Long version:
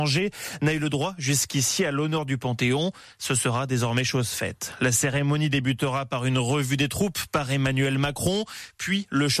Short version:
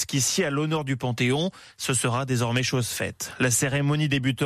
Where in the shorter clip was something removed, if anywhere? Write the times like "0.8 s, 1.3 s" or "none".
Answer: none